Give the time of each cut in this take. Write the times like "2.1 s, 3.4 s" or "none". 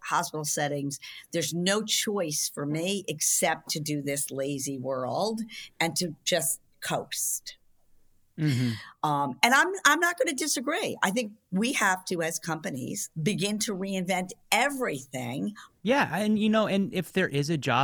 13.1 s, 15.8 s